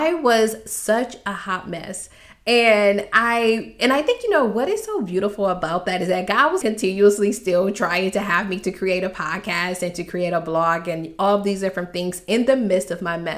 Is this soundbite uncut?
no; 1 cut; at 6.6 s

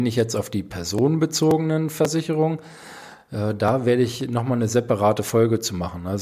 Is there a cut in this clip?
no; 0 cuts

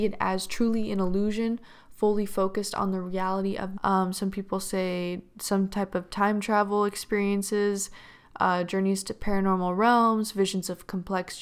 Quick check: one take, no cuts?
no; 1 cut; at 3.8 s

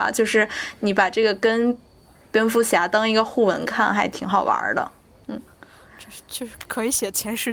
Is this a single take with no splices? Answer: no; 1 cut; at 5.2 s

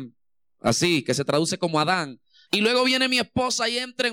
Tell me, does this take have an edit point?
yes; 1 cut; at 2.5 s

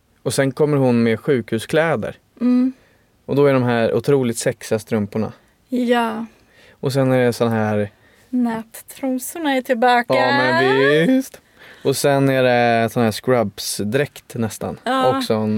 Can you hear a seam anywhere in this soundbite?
no; 0 cuts

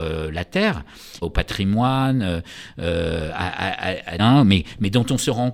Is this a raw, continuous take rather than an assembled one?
no; 2 cuts; at 1.2 s, 4.2 s

